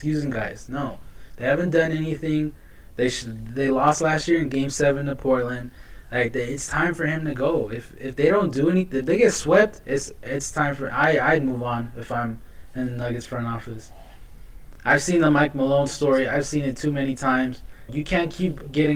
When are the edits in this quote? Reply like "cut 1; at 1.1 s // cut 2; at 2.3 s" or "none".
cut 1; at 17.9 s